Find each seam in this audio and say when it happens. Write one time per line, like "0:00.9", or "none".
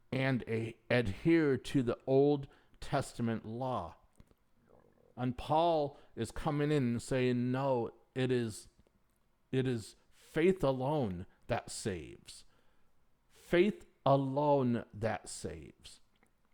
none